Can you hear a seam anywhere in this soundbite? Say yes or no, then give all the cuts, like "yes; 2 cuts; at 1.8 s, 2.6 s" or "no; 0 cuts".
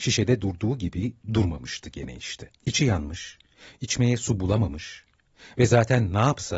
yes; 1 cut; at 2.5 s